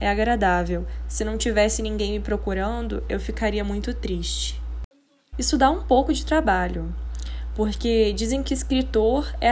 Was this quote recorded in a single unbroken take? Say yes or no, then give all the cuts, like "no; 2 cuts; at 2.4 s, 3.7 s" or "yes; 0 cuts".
no; 1 cut; at 5.3 s